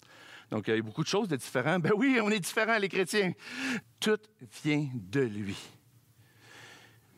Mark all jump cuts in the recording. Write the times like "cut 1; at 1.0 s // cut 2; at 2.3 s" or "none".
cut 1; at 3.8 s